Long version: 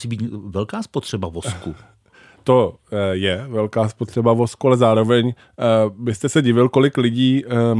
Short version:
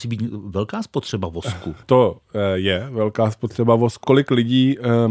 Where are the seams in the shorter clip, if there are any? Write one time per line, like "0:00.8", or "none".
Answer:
0:01.8
0:04.0